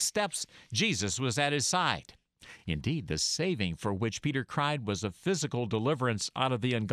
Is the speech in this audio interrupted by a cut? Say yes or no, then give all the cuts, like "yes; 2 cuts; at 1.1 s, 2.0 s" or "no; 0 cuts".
no; 0 cuts